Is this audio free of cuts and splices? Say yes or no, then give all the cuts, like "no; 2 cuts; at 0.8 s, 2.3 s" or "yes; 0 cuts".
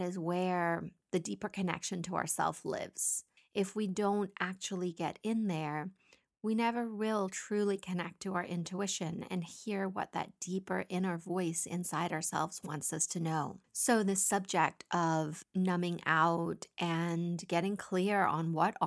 yes; 0 cuts